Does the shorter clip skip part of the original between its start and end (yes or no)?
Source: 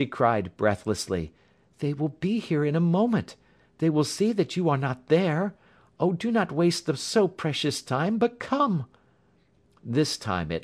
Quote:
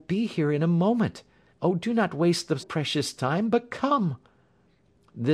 yes